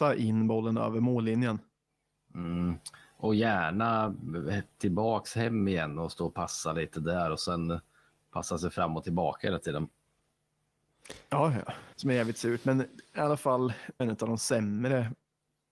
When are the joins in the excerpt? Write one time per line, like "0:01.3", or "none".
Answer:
0:11.9
0:14.0